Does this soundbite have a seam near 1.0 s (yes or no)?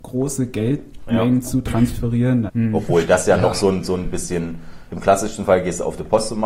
no